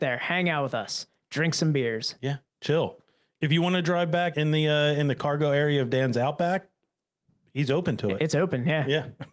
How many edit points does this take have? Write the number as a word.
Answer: one